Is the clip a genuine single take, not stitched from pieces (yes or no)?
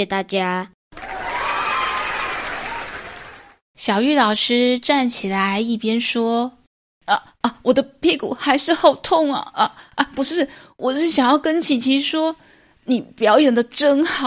yes